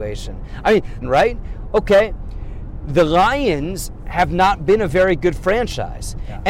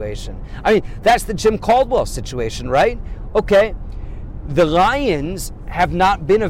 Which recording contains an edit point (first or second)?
first